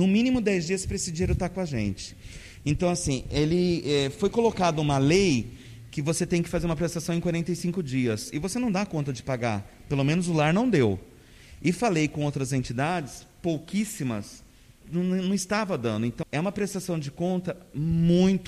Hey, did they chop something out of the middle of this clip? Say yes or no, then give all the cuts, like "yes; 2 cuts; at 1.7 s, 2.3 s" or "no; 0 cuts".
yes; 2 cuts; at 14.8 s, 16.2 s